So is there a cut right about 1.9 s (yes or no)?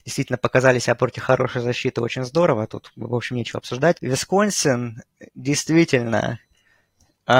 no